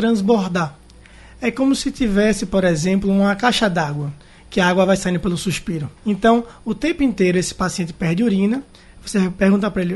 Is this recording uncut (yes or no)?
no